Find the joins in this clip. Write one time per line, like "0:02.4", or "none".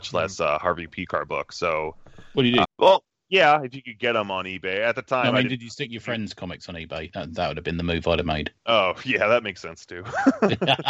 0:02.6
0:08.6